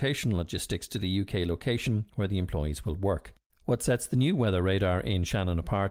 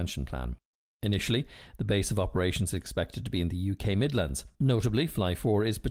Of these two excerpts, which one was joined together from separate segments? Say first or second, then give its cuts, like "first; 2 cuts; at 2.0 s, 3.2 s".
first; 1 cut; at 3.5 s